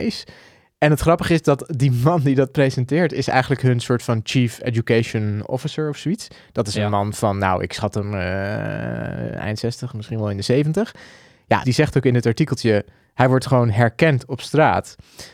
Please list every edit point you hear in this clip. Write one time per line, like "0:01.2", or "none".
0:11.6